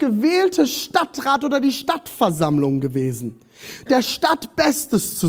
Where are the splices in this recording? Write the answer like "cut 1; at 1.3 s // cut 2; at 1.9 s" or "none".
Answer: cut 1; at 3.9 s